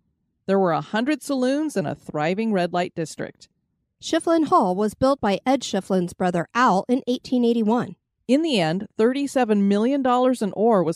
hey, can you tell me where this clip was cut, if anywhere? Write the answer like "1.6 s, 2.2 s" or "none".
3.8 s, 8.2 s